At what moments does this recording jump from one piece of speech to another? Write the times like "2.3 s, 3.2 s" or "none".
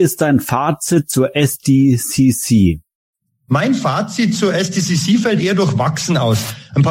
none